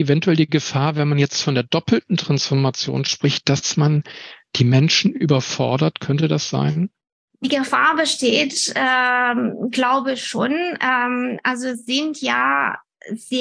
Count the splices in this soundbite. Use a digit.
0